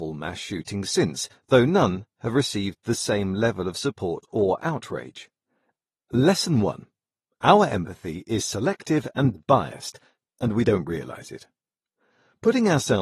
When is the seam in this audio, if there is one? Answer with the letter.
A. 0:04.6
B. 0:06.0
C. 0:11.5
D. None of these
B